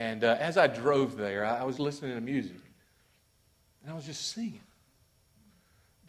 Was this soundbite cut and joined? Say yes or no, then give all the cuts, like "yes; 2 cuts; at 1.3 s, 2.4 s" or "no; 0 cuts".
yes; 1 cut; at 1.8 s